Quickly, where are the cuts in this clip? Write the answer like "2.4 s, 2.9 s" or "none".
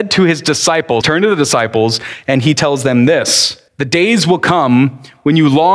1.0 s, 3.7 s